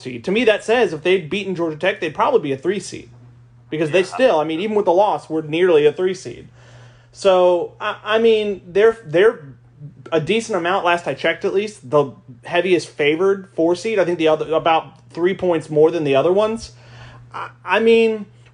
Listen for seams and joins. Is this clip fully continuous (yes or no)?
yes